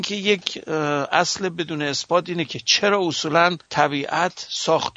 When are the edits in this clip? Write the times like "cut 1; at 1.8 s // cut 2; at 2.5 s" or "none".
cut 1; at 3.6 s